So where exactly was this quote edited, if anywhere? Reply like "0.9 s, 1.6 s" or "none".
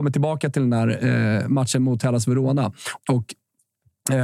3.0 s